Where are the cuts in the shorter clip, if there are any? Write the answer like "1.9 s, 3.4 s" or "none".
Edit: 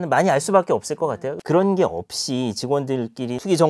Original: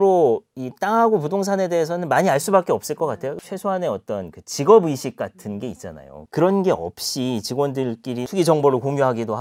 1.4 s